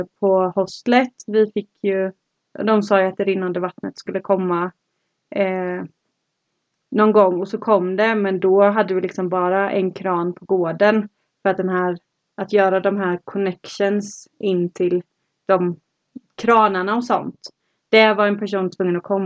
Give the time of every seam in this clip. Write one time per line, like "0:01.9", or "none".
none